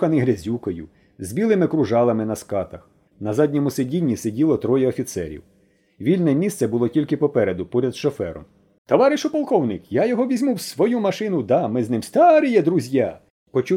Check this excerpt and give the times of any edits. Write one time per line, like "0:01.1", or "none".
0:03.1
0:08.8